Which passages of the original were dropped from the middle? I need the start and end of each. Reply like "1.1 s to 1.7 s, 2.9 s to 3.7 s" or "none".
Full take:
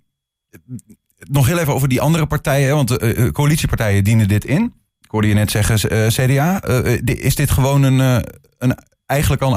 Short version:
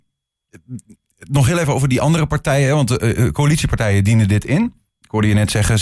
none